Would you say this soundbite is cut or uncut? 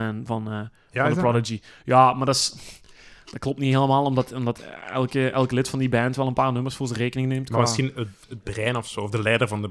uncut